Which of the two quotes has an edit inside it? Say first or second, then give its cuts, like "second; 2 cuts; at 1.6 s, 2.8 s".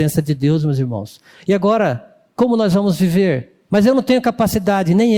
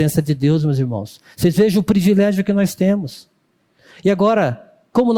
first; 2 cuts; at 1.3 s, 3.7 s